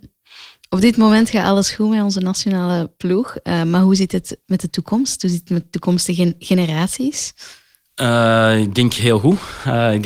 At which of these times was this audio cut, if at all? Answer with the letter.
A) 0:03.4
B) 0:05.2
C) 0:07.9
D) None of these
D